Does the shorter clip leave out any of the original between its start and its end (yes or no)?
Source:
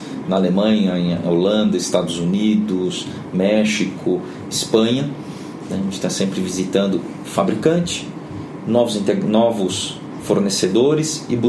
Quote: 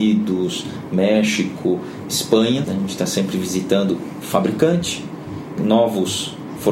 yes